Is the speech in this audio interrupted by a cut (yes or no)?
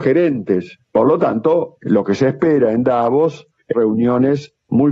yes